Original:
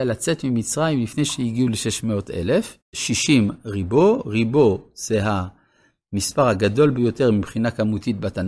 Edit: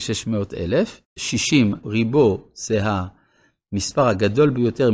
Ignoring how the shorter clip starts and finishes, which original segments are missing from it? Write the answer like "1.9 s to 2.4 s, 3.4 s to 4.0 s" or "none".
3.6 s to 4.2 s